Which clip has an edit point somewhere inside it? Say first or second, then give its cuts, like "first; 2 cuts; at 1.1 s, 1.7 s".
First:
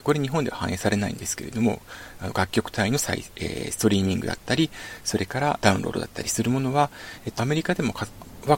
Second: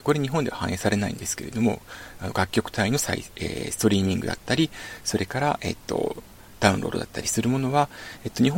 first; 2 cuts; at 5.6 s, 7.4 s